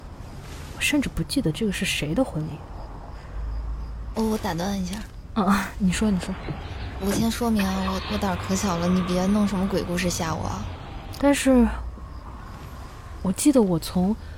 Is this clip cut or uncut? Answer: cut